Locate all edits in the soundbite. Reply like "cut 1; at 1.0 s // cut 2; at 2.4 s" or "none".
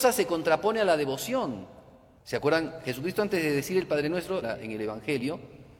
cut 1; at 2.2 s // cut 2; at 4.4 s

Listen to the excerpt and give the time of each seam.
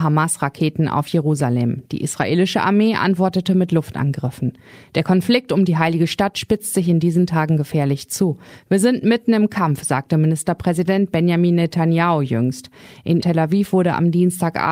none

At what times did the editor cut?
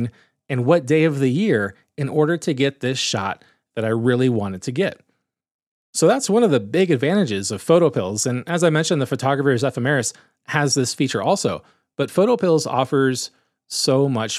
none

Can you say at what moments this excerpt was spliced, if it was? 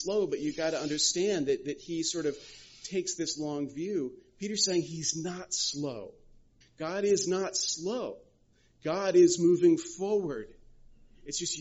cut 1; at 6.6 s

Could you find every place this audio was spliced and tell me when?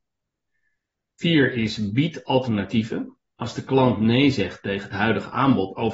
none

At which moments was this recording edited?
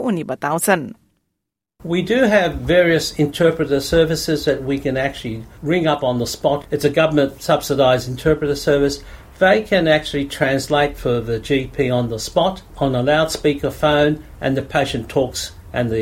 none

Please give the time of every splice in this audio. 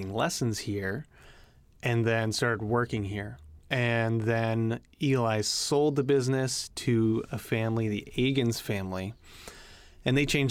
cut 1; at 3.6 s

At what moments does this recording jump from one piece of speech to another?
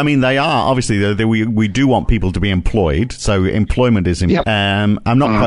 cut 1; at 4.4 s

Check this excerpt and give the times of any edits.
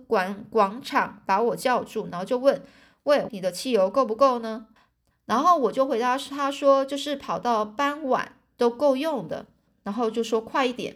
cut 1; at 3.3 s // cut 2; at 4.8 s // cut 3; at 9.7 s

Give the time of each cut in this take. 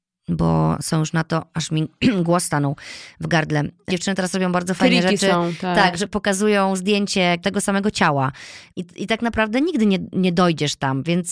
cut 1; at 3.9 s // cut 2; at 7.4 s // cut 3; at 8.7 s

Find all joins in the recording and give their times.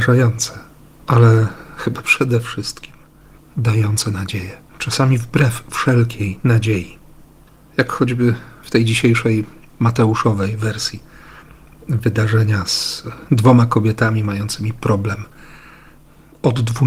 cut 1; at 1.0 s // cut 2; at 4.7 s

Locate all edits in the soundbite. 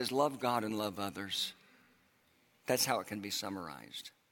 none

